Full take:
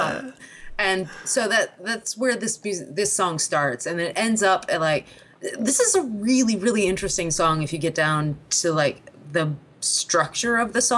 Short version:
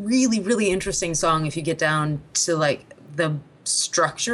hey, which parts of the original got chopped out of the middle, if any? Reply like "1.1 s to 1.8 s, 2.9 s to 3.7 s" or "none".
none